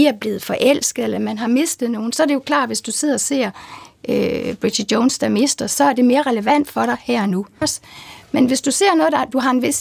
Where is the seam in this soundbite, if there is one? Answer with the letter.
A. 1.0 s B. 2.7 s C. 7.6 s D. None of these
C